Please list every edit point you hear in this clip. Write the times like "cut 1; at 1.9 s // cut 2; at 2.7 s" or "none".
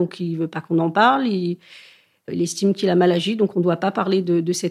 none

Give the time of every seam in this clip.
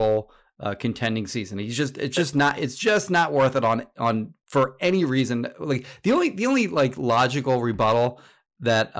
none

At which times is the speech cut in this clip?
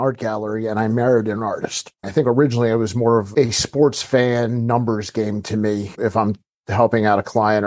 cut 1; at 2.0 s // cut 2; at 5.9 s

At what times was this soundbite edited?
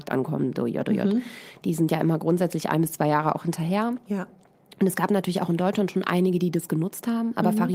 none

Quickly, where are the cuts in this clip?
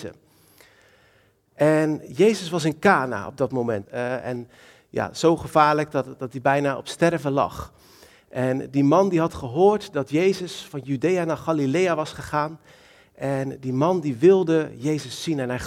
cut 1; at 3.8 s

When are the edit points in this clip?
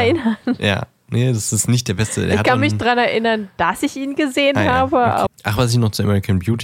cut 1; at 5.3 s

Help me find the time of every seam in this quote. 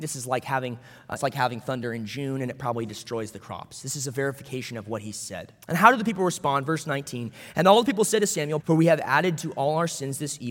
cut 1; at 1.2 s // cut 2; at 5.6 s // cut 3; at 8.6 s

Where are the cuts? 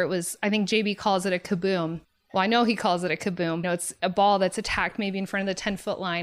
cut 1; at 3.6 s

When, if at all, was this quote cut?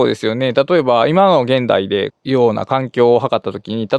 cut 1; at 2.1 s

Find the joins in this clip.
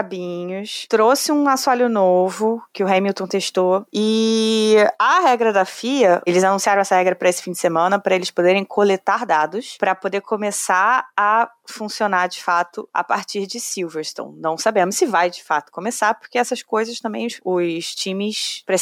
none

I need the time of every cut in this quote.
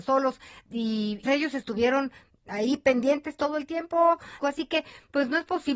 cut 1; at 1.2 s // cut 2; at 4.4 s

